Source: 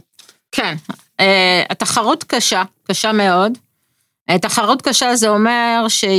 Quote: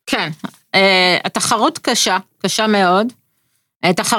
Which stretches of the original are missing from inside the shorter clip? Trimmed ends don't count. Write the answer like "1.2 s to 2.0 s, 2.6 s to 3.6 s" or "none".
none

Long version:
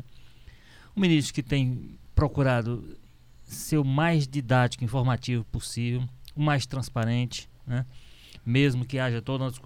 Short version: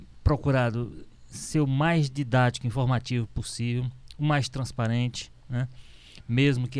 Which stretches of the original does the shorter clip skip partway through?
3.1 s to 3.3 s

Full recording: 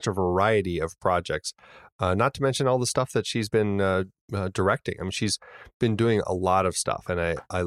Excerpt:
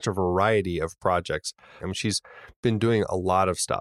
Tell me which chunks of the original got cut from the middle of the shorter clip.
1.8 s to 5.0 s

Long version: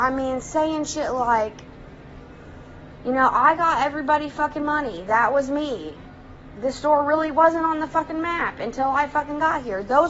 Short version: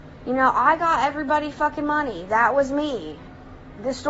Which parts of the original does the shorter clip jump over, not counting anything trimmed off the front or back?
none

